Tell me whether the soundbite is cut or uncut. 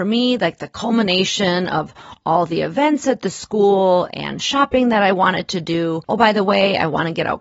cut